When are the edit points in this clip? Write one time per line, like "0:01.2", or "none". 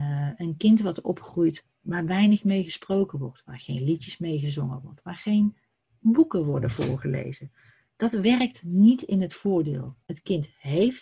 0:10.0